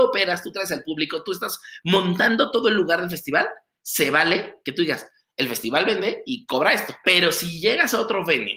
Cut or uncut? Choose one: cut